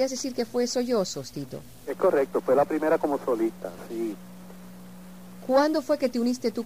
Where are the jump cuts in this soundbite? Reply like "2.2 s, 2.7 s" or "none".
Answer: none